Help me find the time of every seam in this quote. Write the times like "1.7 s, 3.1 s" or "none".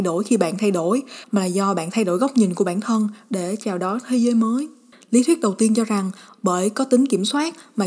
1.2 s, 4.9 s